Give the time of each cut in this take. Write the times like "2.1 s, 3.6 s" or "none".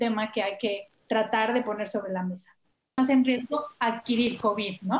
3.0 s